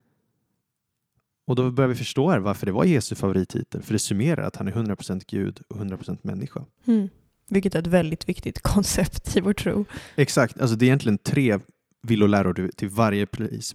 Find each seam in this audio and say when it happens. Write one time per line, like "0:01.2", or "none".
none